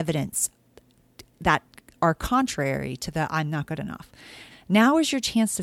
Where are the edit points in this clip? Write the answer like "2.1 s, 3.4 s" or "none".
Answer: 4.5 s